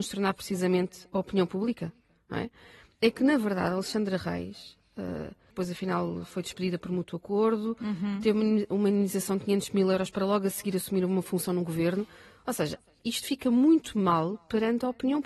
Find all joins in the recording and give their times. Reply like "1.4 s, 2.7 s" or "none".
5.5 s, 13.0 s